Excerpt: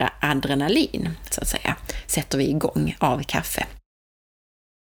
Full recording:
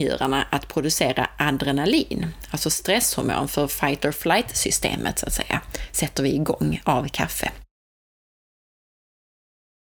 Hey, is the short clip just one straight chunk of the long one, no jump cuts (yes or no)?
no